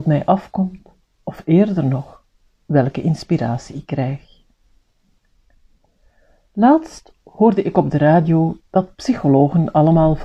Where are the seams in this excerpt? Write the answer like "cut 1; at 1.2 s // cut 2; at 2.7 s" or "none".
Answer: none